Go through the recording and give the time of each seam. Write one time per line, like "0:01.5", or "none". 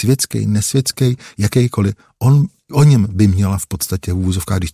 none